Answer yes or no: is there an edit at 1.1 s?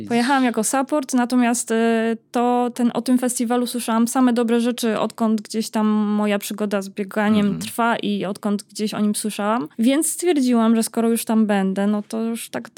no